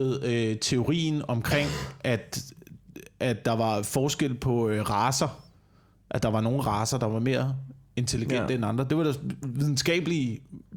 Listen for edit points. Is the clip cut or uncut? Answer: uncut